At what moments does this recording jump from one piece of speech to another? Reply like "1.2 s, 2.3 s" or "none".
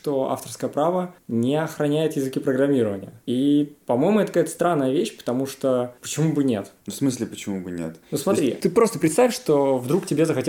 8.0 s